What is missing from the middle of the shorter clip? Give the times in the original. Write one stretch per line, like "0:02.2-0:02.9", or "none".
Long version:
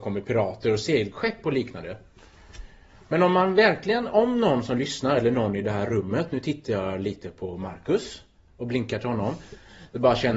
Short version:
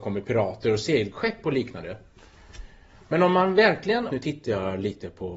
0:04.1-0:06.3